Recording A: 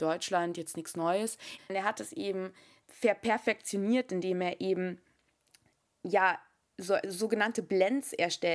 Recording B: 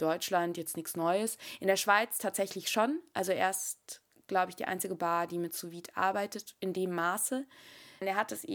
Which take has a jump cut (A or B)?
A